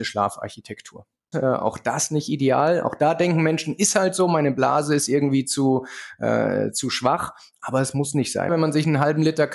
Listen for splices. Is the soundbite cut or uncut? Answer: cut